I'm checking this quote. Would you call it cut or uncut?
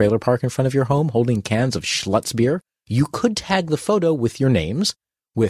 uncut